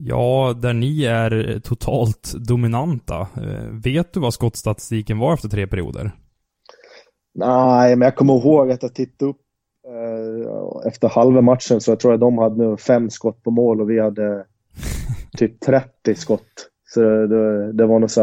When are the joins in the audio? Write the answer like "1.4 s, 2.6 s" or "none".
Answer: none